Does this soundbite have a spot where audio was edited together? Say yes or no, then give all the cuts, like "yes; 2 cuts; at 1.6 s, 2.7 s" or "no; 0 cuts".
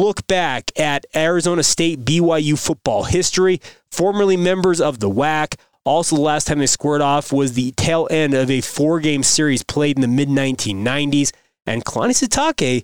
no; 0 cuts